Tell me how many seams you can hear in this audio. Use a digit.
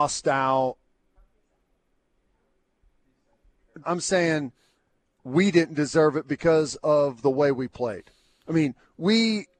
1